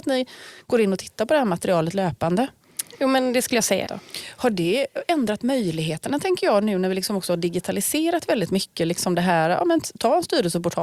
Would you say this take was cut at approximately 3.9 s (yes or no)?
yes